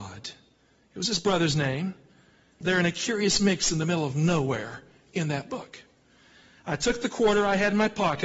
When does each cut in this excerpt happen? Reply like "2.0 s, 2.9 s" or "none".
2.6 s